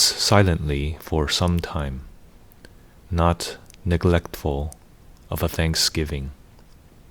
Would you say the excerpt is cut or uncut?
uncut